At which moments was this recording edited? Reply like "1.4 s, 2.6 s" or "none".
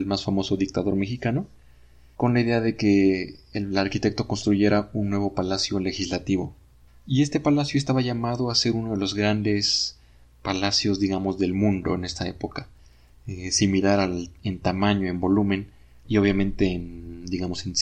16.0 s